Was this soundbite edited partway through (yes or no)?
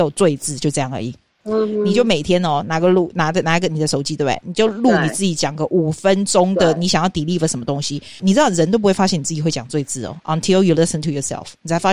yes